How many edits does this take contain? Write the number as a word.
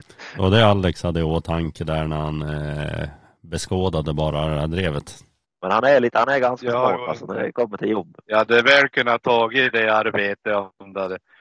zero